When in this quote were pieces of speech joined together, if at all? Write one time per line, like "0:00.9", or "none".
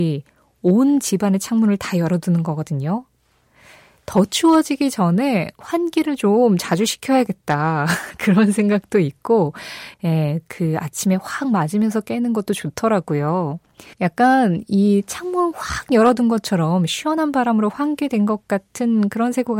0:09.9
0:13.9

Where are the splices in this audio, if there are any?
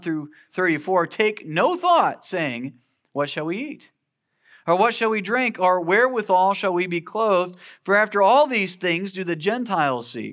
none

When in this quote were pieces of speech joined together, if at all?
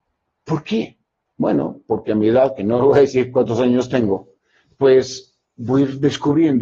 none

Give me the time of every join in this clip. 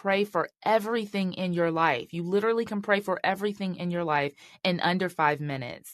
none

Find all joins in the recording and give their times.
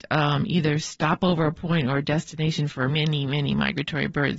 0:02.9

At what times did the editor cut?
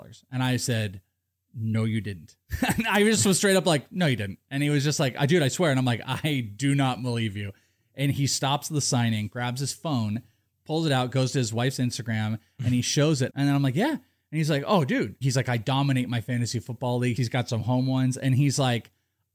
0:13.3
0:15.2
0:17.2

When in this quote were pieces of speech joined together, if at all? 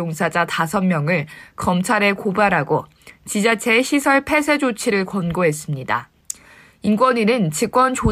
none

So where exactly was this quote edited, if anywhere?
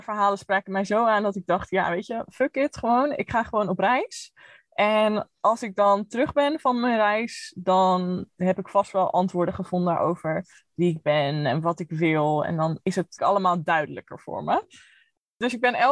0:13.2

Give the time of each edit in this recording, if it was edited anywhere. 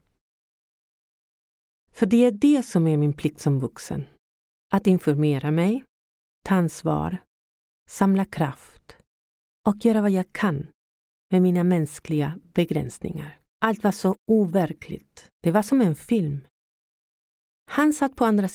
0:13.5
0:15.3

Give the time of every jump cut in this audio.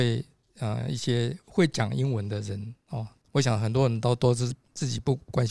0:03.2

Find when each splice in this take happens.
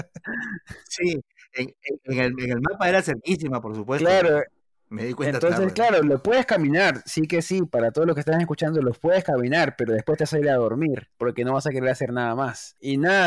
none

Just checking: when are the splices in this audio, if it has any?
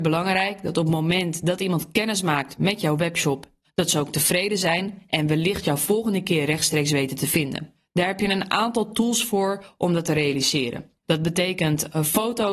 0:03.6
0:11.0

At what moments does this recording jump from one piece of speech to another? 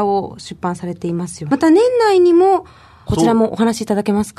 0:01.5
0:03.1

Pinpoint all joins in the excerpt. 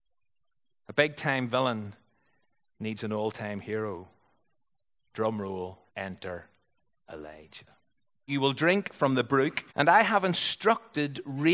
0:05.9
0:08.3
0:09.7

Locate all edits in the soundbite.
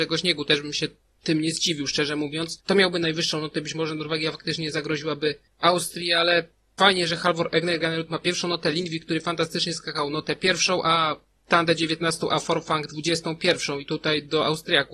none

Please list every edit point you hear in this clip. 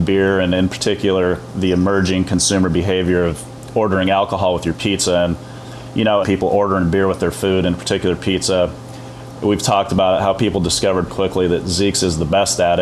0:06.2
0:11.1

